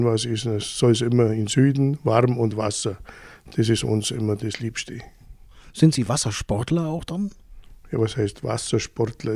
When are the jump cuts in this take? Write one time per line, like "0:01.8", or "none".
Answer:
none

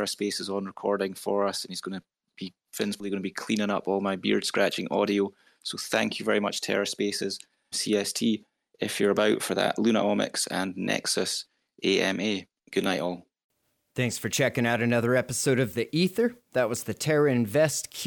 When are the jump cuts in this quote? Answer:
0:07.7

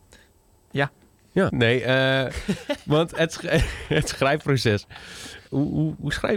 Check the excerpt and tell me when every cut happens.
0:01.5

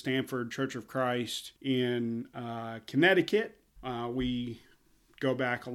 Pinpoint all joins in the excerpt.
0:01.6
0:03.8

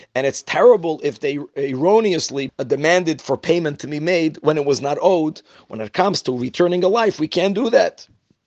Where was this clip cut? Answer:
0:02.5
0:05.5

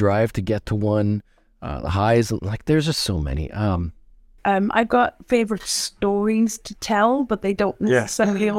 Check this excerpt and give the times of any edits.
none

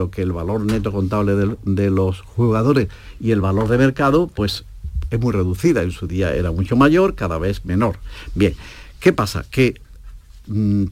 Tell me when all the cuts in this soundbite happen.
none

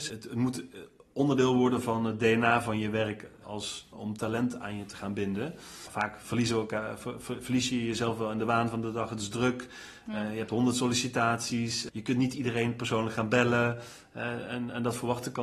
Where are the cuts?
0:03.9

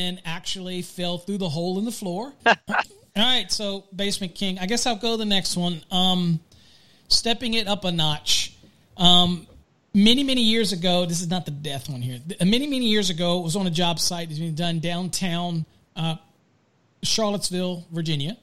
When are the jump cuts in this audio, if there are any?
0:02.4

